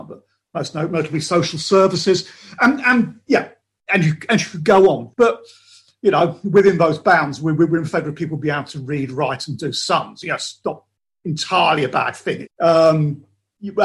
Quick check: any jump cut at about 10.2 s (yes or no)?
no